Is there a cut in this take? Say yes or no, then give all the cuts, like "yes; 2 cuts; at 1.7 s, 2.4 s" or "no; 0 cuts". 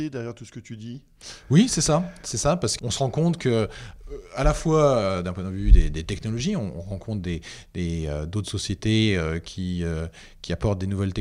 yes; 1 cut; at 2.8 s